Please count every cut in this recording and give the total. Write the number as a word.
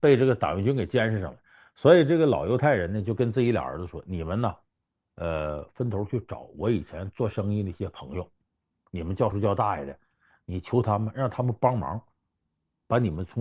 one